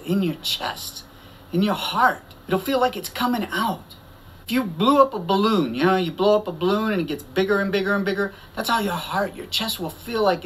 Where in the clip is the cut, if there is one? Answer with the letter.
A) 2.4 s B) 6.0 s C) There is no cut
A